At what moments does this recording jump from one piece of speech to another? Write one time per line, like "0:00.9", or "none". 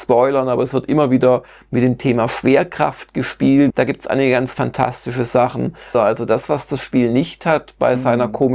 0:03.7
0:05.9

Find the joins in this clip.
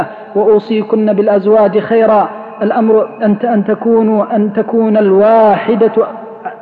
0:04.3

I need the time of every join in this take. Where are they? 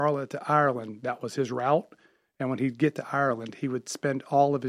none

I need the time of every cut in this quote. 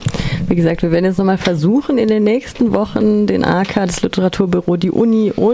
none

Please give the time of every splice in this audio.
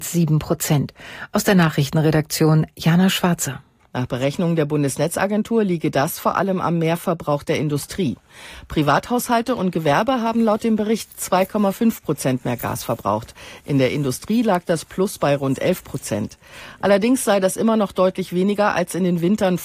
none

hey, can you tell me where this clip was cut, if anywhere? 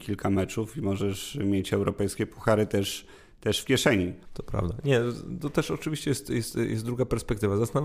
0:04.3

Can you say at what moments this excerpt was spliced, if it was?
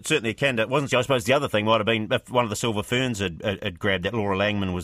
none

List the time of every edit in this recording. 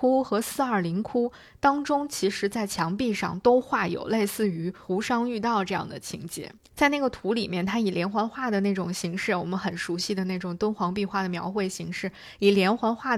0:06.7

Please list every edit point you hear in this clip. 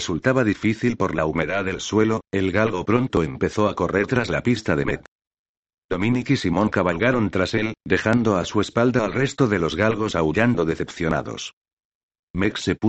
none

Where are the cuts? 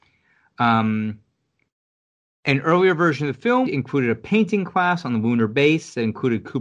0:03.7

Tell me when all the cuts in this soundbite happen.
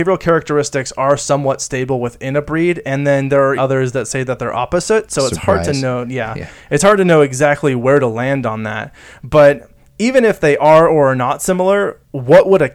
0:03.6

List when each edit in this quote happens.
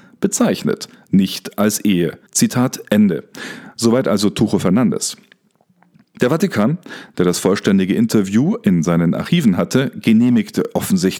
0:02.3

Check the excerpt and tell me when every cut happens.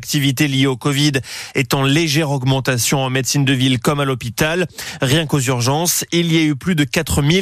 none

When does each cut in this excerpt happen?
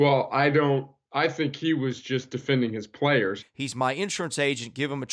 0:03.4

